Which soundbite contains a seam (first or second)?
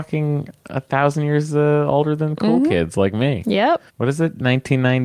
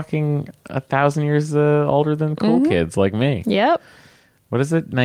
first